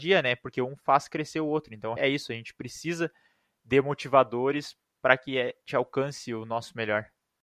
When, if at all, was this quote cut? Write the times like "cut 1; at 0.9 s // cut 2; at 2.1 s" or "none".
cut 1; at 2.0 s